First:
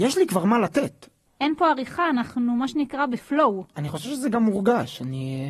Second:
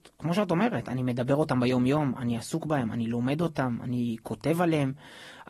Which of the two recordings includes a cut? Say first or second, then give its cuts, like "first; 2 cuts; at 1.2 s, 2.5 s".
first; 1 cut; at 1.3 s